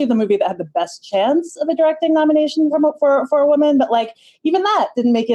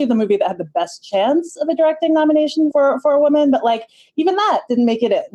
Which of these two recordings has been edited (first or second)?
second